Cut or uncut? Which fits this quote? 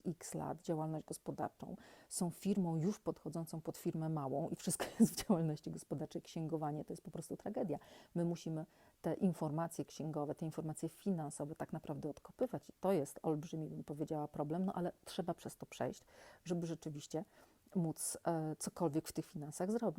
uncut